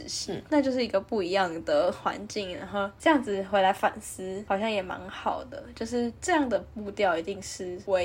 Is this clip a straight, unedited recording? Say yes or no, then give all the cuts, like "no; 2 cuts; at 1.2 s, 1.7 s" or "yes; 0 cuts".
yes; 0 cuts